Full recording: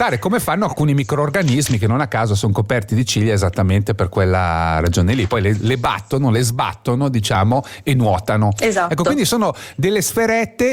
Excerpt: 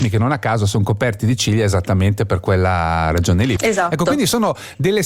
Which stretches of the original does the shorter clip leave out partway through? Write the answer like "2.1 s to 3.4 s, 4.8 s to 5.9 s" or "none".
5.3 s to 8.6 s